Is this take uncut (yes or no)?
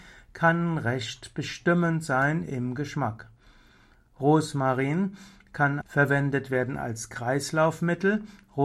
no